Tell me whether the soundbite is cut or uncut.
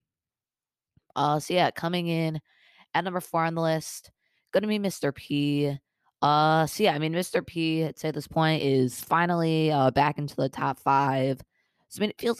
uncut